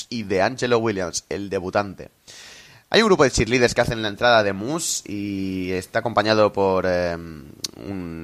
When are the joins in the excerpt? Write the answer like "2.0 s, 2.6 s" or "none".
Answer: none